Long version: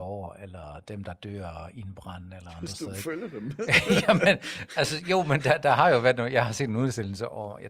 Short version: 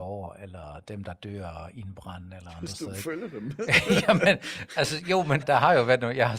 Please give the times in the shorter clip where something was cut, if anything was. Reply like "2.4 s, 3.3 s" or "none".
5.4 s